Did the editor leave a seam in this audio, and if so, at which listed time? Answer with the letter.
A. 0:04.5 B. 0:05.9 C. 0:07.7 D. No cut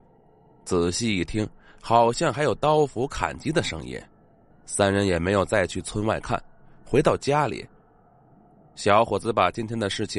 A